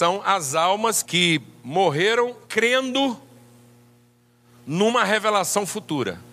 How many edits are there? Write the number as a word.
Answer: two